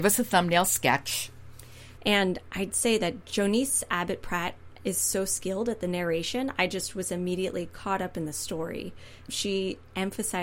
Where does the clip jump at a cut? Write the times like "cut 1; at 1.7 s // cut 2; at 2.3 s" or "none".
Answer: cut 1; at 2.0 s